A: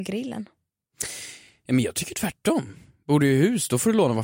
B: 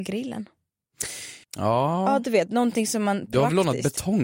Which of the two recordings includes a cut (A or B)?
B